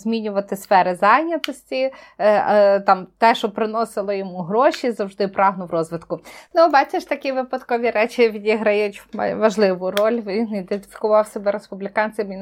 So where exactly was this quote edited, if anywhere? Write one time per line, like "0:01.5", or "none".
0:06.5